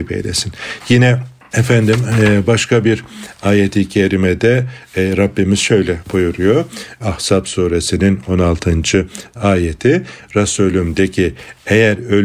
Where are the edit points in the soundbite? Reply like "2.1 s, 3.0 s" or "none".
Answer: none